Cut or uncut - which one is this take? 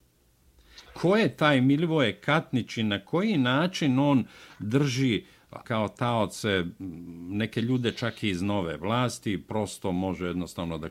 cut